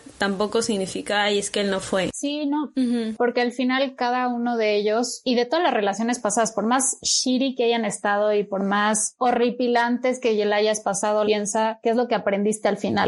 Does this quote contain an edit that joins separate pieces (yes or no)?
yes